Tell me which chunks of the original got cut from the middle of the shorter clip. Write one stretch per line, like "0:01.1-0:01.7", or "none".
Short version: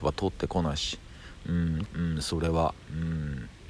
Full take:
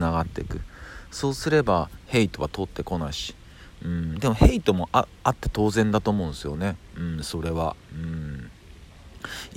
0:04.2-0:06.9